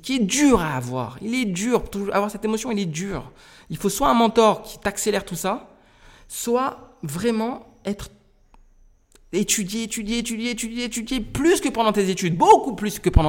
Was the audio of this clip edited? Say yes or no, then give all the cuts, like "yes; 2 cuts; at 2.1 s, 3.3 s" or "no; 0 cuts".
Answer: no; 0 cuts